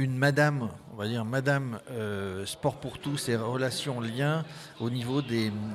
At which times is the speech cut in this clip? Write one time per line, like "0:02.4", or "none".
none